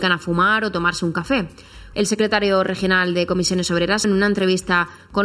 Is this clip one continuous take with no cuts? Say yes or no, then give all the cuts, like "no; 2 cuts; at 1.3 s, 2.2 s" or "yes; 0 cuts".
no; 2 cuts; at 1.9 s, 4.0 s